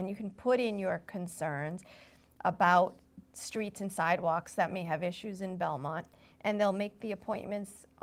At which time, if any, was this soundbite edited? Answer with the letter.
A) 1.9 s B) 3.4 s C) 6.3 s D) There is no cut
C